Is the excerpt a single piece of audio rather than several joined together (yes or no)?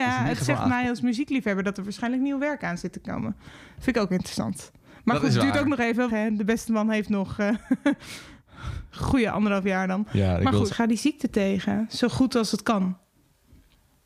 no